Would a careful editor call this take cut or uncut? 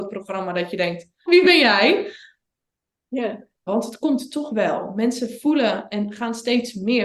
cut